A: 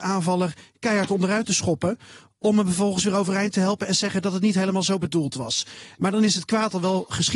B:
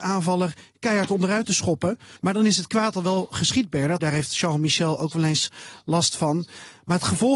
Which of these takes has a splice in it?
B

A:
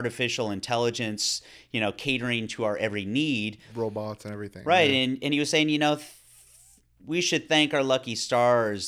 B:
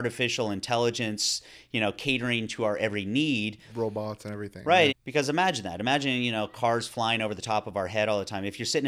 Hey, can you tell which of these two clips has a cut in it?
B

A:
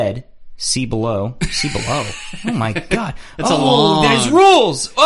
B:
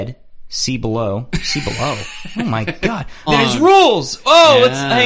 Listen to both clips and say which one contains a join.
B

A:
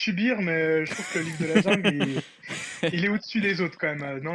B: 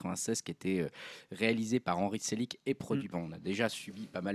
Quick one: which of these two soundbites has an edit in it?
B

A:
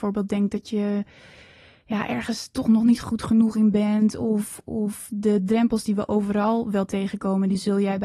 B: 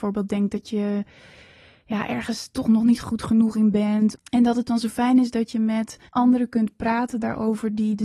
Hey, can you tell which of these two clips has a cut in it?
B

